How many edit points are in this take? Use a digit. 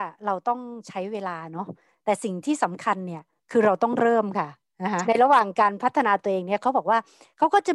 1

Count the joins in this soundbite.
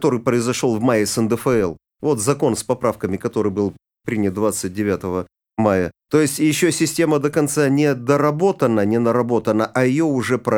0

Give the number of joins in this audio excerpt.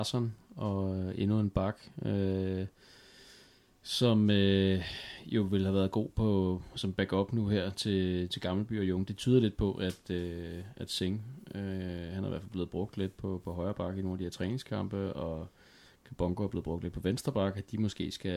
1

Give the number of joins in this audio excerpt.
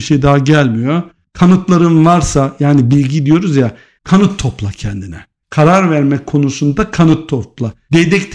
0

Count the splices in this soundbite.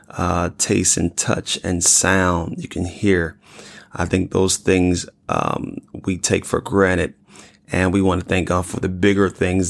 0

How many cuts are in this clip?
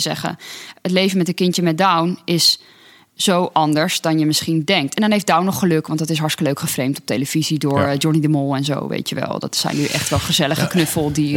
0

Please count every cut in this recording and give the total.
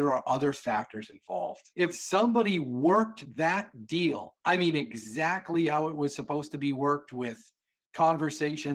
2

